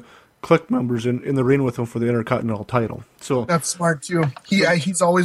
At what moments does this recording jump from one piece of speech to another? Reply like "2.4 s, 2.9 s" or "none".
none